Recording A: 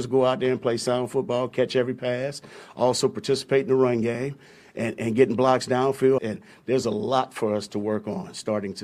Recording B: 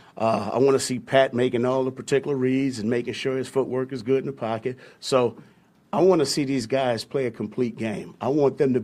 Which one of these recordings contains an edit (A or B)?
A